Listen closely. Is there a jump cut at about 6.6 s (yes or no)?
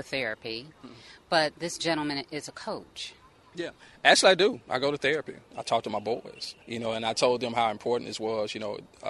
yes